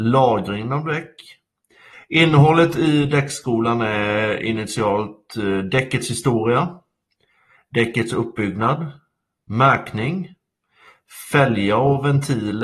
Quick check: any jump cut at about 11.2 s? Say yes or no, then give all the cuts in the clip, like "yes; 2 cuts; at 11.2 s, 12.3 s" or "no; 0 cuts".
no; 1 cut; at 1.9 s